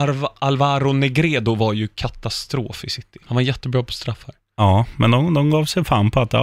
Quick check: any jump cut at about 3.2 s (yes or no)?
yes